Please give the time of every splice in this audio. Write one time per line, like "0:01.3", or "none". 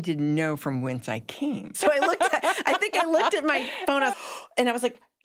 0:01.7
0:04.1